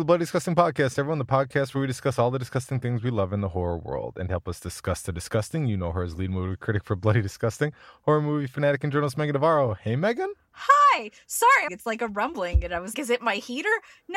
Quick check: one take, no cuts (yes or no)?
no